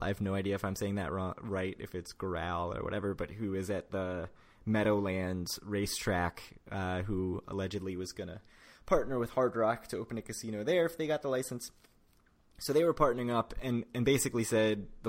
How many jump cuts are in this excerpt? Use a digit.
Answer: 0